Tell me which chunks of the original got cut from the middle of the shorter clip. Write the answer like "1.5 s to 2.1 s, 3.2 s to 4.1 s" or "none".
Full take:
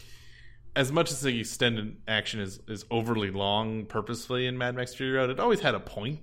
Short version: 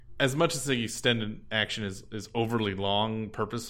none